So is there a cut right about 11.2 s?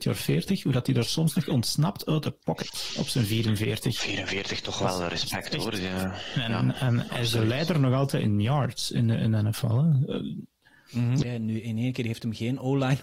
yes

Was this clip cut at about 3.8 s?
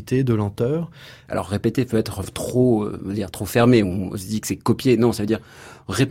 no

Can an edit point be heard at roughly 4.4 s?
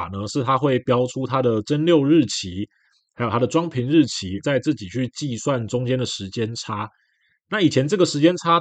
yes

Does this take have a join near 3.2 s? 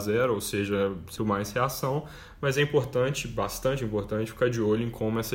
no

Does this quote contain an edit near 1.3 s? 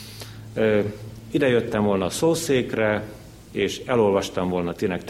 no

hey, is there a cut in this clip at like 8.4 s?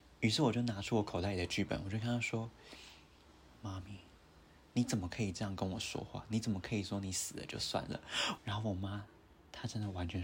yes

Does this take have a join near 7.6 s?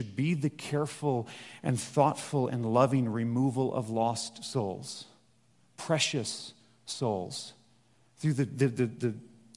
no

